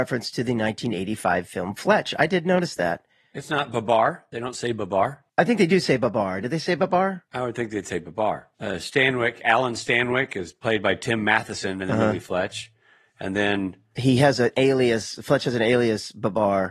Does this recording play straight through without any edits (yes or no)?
yes